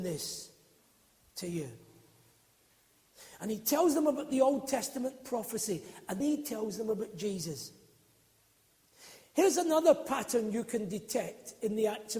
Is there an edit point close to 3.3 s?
no; 1 cut; at 6.2 s

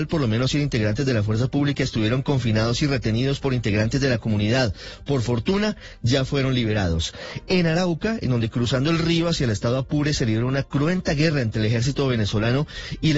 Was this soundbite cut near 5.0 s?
no; 0 cuts

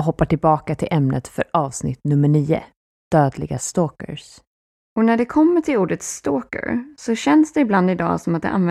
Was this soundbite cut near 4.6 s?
no; 0 cuts

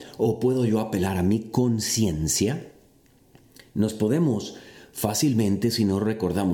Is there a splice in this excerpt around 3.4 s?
no; 0 cuts

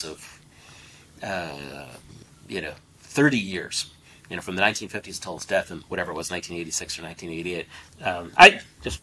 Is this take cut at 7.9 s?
yes; 1 cut; at 7.9 s

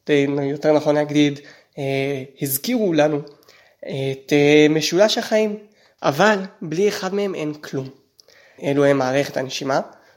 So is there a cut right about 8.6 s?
yes; 2 cuts; at 6.0 s, 8.6 s

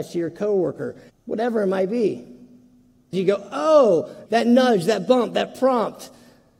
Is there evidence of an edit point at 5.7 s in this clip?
no; 3 cuts; at 1.1 s, 3.1 s, 4.3 s

